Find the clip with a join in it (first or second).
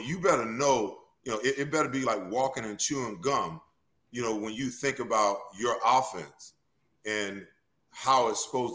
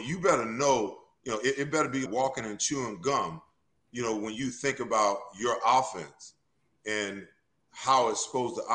second